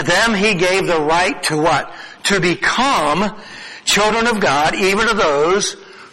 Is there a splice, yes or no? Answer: no